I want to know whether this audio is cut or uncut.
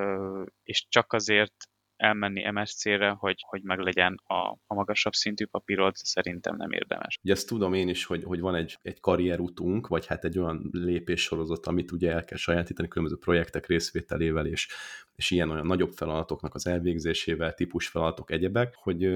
cut